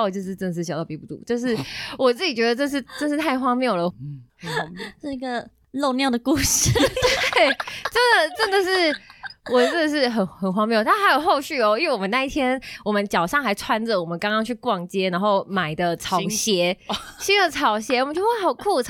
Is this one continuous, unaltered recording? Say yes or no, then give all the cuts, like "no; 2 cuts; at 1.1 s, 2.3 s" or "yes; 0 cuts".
no; 1 cut; at 3.9 s